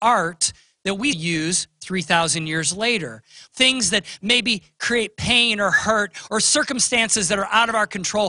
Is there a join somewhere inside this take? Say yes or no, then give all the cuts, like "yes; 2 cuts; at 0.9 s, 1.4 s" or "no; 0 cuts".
yes; 2 cuts; at 1.1 s, 3.5 s